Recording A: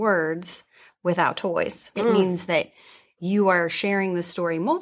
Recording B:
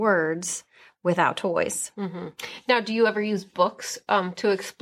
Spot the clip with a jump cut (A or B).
A